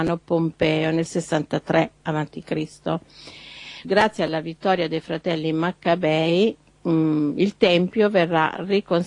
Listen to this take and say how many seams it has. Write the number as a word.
one